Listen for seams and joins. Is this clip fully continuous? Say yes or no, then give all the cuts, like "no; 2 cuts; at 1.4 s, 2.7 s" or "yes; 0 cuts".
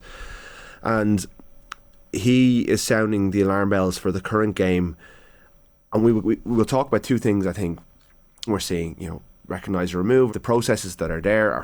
no; 2 cuts; at 8.5 s, 10.3 s